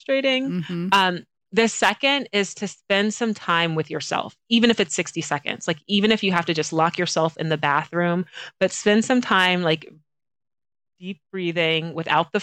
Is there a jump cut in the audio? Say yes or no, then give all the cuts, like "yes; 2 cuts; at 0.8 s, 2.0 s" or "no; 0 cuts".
no; 0 cuts